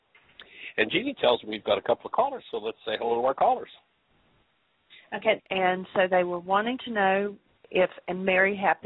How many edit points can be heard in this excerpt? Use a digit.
2